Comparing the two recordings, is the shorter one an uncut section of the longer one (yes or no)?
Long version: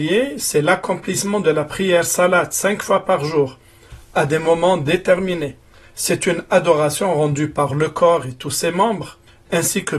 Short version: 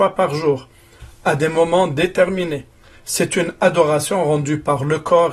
yes